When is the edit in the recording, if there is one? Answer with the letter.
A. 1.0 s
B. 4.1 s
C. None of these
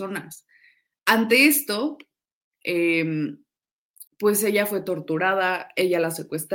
B